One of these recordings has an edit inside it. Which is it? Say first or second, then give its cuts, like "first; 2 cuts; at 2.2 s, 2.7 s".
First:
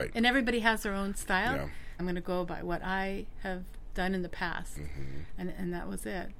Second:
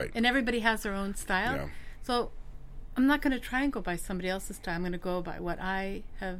first; 1 cut; at 2.0 s